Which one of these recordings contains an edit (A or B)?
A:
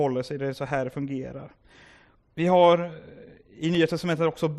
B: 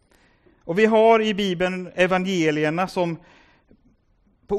A